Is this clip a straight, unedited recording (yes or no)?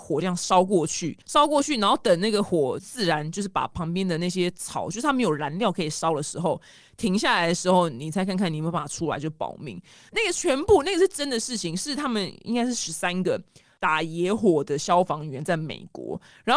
no